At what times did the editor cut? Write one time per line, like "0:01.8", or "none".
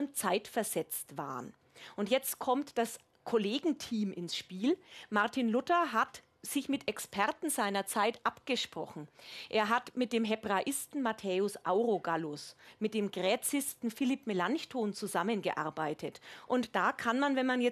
0:16.5